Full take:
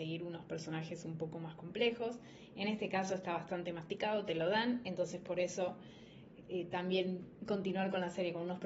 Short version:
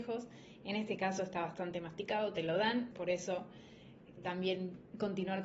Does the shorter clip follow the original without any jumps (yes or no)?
no